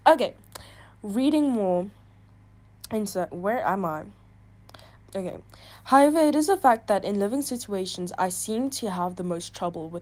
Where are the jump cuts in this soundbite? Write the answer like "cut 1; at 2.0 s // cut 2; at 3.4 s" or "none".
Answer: cut 1; at 3.3 s // cut 2; at 5.0 s